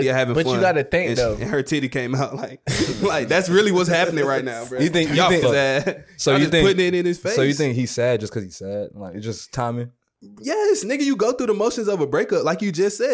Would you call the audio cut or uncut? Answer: cut